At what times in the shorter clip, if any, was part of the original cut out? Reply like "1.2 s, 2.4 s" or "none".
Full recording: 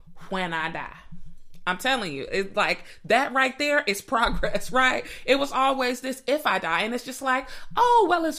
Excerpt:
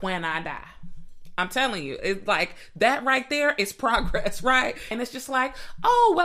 4.9 s